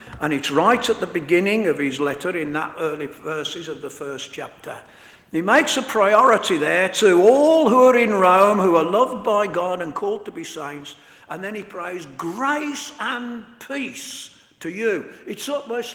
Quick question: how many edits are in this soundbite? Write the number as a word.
zero